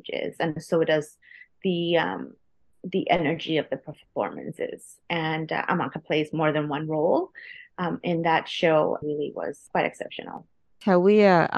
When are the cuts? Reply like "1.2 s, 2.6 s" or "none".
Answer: 9.0 s